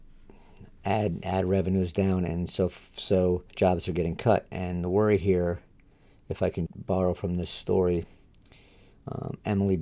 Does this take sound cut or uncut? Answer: cut